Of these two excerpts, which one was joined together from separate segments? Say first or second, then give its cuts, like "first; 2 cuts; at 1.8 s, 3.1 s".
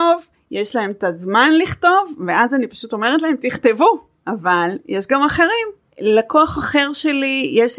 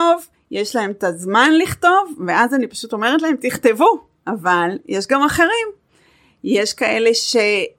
first; 1 cut; at 5.9 s